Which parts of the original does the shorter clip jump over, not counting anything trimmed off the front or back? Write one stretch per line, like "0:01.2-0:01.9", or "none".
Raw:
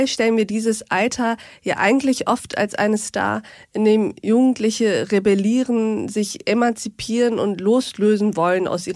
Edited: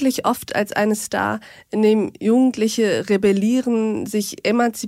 none